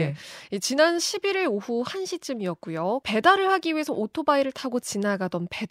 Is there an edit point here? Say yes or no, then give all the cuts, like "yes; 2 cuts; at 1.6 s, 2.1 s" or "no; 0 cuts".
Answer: yes; 1 cut; at 3.0 s